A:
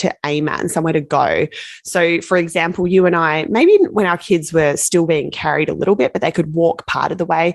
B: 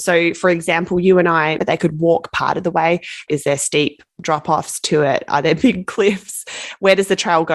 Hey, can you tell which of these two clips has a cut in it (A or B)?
B